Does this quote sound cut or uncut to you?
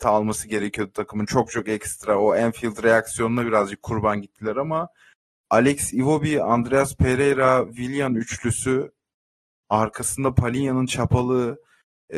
uncut